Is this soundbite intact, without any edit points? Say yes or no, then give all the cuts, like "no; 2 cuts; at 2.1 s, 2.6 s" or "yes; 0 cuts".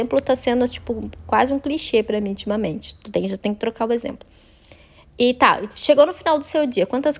yes; 0 cuts